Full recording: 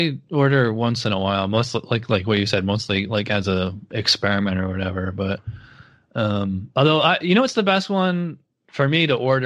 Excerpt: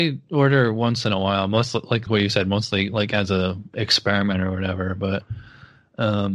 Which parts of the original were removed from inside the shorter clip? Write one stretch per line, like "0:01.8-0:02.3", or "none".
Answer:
0:02.1-0:02.2